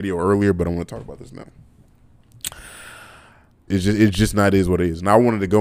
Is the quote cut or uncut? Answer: cut